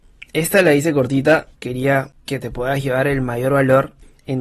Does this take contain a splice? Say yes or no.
yes